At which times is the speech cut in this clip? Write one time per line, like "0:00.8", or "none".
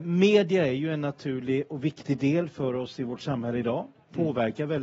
none